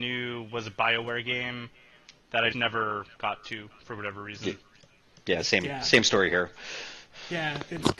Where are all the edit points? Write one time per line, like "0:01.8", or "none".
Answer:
0:02.5